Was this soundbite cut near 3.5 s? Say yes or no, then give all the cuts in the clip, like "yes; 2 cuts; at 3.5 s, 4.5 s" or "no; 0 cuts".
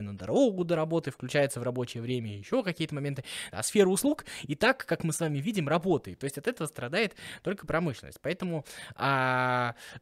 yes; 1 cut; at 3.5 s